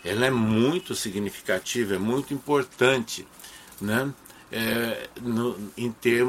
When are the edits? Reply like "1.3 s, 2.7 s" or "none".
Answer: none

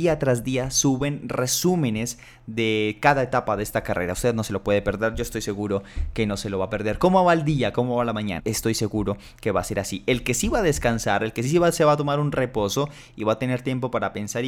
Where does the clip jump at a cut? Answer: 8.4 s

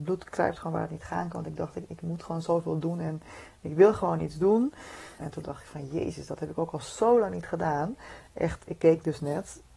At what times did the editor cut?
5.2 s

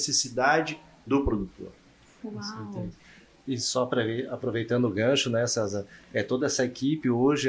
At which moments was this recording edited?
none

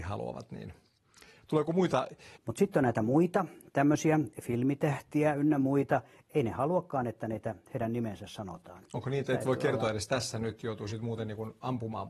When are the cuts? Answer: 2.4 s

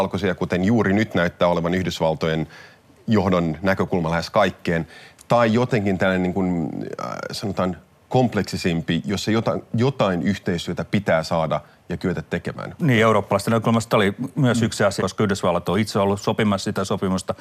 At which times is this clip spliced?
12.8 s, 15.0 s

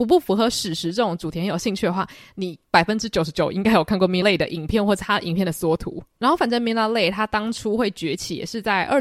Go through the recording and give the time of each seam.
2.7 s, 4.2 s

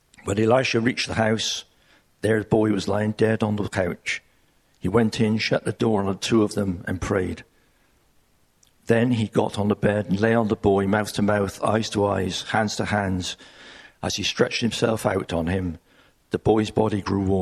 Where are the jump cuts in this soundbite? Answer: none

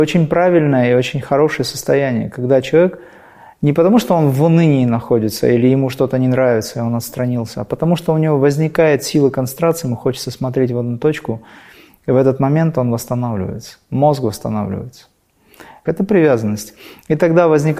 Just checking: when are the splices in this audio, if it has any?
15.9 s

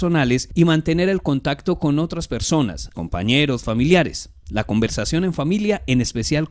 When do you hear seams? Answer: 2.9 s

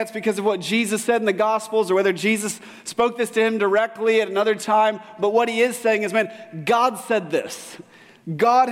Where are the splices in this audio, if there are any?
none

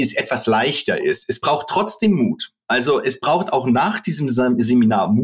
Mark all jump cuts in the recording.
none

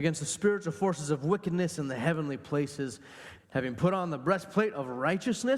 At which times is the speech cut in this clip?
3.4 s

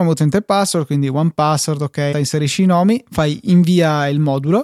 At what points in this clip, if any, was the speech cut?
2.1 s

